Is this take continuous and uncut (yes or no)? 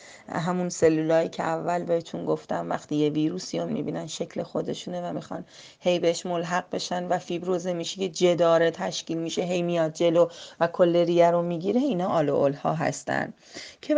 no